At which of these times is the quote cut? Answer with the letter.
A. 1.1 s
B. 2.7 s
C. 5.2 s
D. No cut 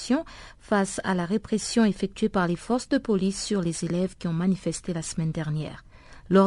D